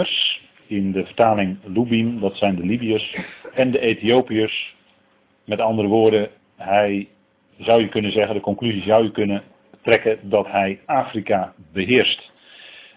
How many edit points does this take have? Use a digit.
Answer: 0